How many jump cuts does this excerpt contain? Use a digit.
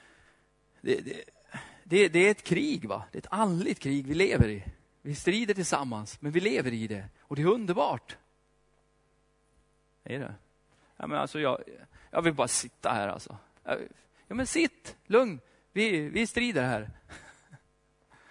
0